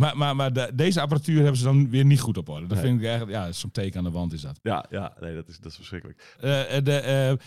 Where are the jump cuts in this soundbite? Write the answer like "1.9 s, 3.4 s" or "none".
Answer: 6.4 s